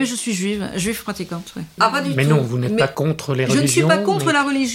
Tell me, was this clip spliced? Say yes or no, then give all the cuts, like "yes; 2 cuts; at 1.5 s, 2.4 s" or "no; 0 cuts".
yes; 1 cut; at 1.8 s